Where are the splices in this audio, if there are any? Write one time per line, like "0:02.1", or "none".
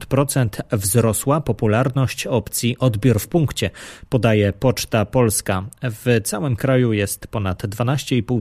none